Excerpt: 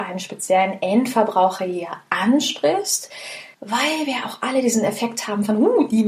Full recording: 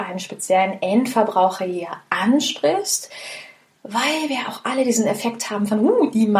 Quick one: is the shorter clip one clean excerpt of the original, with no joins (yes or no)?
no